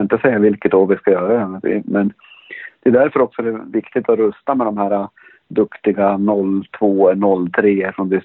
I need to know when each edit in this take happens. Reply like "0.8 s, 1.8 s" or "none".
none